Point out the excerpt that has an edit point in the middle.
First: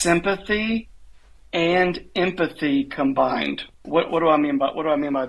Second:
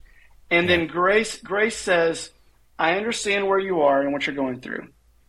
first; 1 cut; at 3.7 s

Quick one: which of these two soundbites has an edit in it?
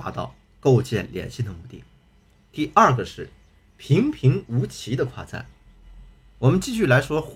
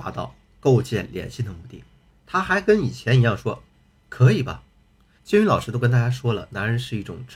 second; 2 cuts; at 2.1 s, 5.2 s

